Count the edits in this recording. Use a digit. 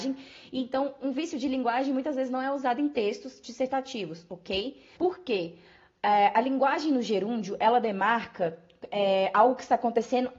1